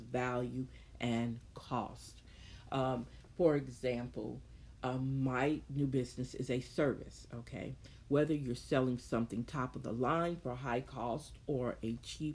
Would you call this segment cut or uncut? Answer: cut